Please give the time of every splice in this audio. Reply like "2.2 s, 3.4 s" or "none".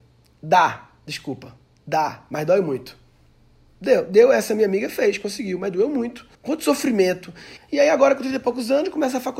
6.3 s, 7.6 s